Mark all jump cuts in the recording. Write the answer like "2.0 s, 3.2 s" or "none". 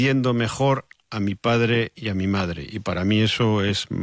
none